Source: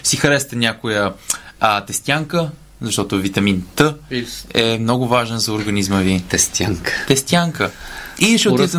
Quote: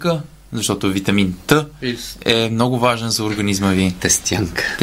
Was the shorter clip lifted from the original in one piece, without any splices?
yes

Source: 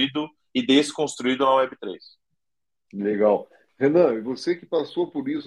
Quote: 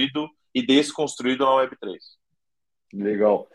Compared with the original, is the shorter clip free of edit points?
yes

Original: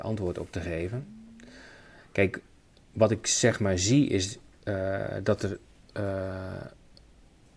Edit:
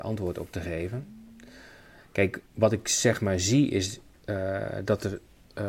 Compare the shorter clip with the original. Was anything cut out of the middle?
yes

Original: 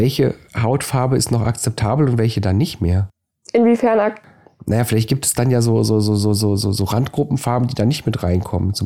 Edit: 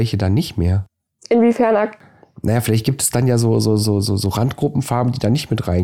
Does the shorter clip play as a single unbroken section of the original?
no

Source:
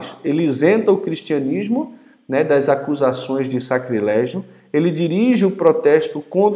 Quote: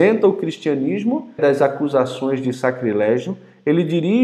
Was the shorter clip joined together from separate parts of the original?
yes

